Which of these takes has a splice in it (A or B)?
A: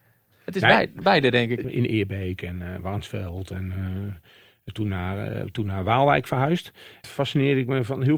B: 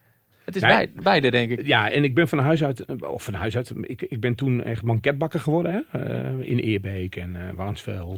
A